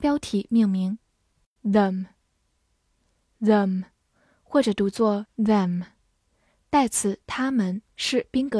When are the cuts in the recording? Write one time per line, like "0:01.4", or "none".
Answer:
0:01.6